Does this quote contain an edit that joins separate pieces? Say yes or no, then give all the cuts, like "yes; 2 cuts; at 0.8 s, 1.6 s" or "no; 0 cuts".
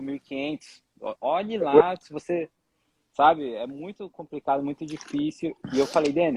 no; 0 cuts